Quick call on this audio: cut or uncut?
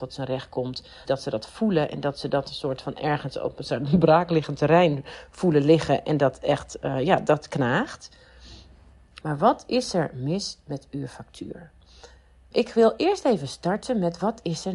cut